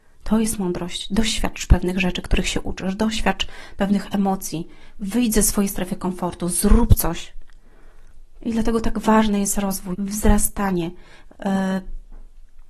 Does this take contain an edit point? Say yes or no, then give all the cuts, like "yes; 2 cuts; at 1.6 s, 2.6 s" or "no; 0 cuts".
yes; 3 cuts; at 8.4 s, 9.9 s, 11.3 s